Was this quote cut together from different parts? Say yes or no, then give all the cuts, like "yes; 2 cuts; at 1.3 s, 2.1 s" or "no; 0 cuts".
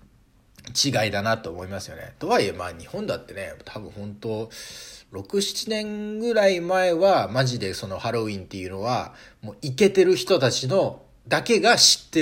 no; 0 cuts